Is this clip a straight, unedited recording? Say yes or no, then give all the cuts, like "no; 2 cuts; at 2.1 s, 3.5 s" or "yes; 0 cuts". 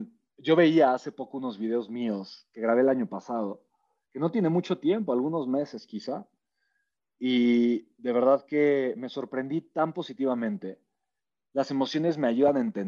no; 1 cut; at 11.4 s